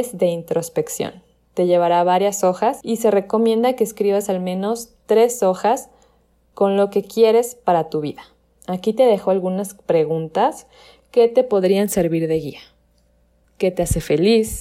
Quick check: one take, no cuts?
yes; 0 cuts

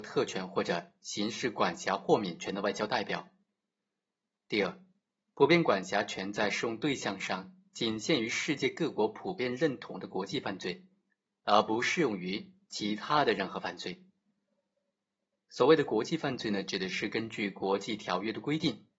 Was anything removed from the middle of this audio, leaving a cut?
no; 0 cuts

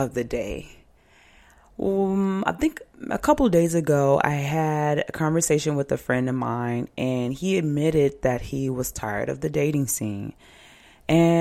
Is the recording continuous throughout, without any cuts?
yes; 0 cuts

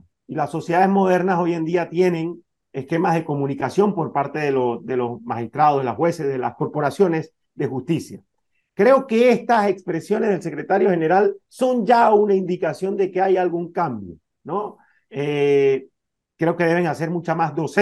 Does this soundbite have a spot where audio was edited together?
no; 0 cuts

